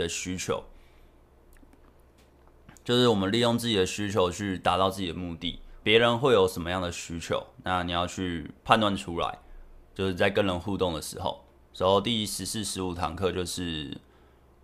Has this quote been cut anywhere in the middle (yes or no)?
yes